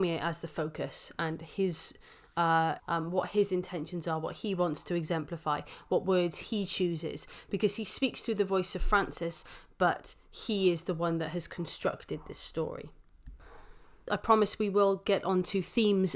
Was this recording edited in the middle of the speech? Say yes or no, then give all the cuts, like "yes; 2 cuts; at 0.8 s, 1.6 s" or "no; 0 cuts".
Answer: yes; 2 cuts; at 2.8 s, 14.1 s